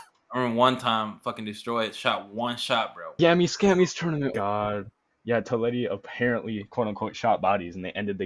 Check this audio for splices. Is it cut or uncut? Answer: cut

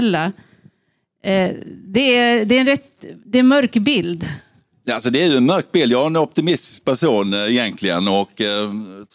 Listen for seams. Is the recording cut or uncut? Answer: uncut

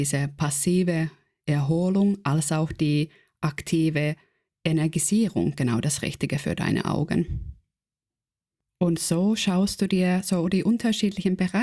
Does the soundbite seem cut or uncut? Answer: uncut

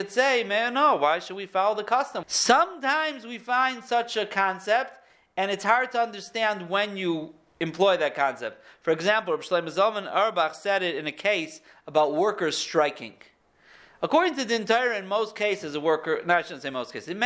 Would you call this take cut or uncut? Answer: cut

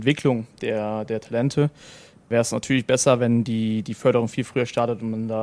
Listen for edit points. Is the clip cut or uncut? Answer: uncut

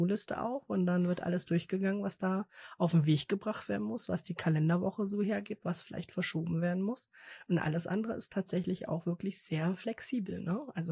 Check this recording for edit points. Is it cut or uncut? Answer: uncut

